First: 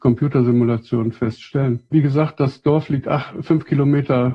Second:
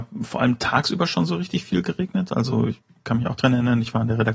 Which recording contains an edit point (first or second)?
first